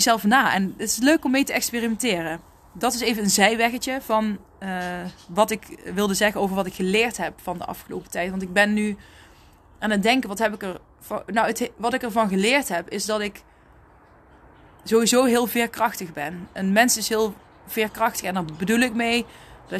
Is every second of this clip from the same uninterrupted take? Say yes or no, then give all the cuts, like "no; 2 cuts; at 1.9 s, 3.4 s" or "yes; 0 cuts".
yes; 0 cuts